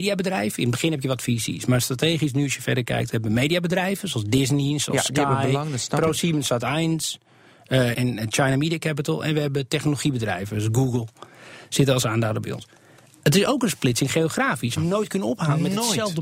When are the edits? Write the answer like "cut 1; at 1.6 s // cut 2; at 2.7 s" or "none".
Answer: cut 1; at 7.9 s // cut 2; at 14.8 s